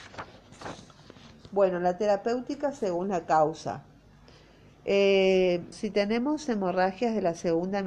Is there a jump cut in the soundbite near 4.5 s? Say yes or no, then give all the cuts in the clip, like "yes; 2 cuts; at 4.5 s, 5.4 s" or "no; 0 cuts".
no; 1 cut; at 5.7 s